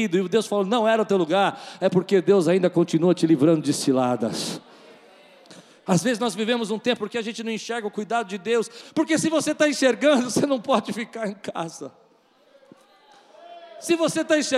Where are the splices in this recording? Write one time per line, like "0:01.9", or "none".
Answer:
0:07.0
0:08.8